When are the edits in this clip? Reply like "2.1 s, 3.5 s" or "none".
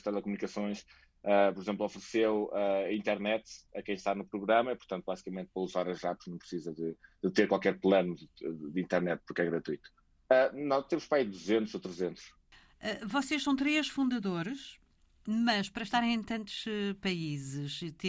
10.3 s